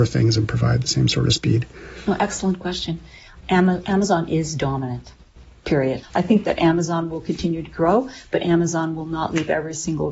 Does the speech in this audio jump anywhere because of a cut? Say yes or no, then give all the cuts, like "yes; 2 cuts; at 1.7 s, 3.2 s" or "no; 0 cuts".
yes; 2 cuts; at 3.4 s, 6.0 s